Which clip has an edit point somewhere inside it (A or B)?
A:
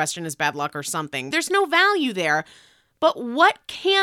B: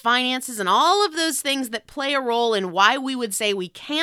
A